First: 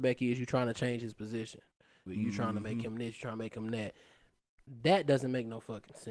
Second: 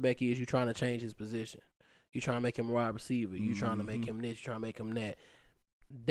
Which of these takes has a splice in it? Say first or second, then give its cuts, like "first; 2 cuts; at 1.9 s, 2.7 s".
first; 1 cut; at 2.1 s